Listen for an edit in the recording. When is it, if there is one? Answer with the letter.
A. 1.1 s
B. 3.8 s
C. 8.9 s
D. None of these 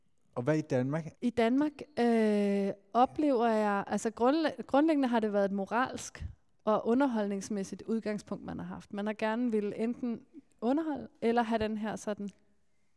A